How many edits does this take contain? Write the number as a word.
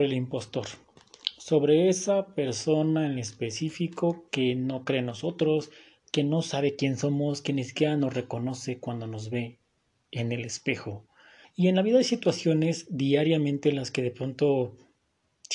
one